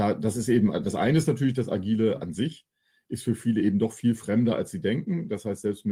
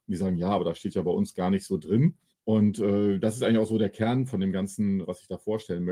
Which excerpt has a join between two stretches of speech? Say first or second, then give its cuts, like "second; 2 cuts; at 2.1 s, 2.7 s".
second; 2 cuts; at 2.3 s, 5.0 s